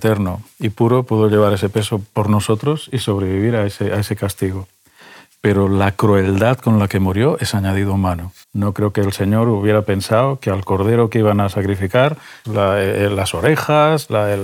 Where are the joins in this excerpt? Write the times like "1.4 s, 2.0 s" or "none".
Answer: 8.4 s, 12.4 s